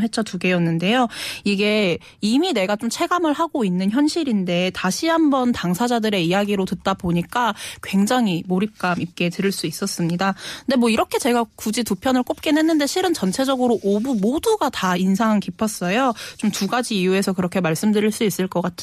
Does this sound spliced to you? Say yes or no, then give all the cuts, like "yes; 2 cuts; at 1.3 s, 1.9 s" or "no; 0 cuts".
no; 0 cuts